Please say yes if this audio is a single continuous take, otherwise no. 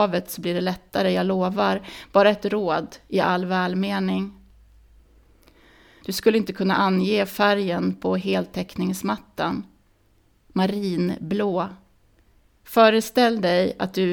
no